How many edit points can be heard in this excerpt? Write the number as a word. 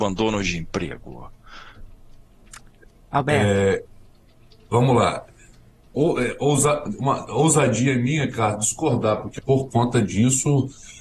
two